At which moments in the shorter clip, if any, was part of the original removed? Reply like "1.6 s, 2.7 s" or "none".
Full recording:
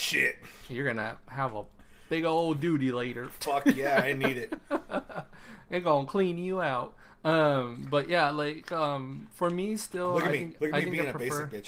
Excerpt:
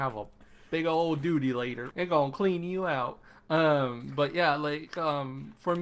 1.9 s